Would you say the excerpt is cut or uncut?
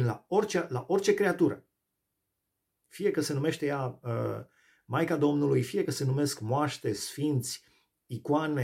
uncut